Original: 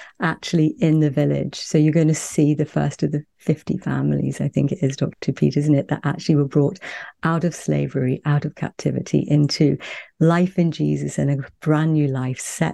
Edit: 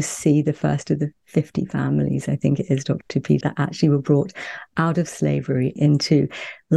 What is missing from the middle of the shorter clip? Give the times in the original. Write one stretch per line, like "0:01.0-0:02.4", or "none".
0:05.5-0:05.9
0:08.2-0:09.2